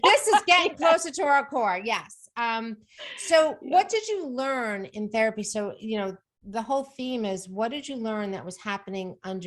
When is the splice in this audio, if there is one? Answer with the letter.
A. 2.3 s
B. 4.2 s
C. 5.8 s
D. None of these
D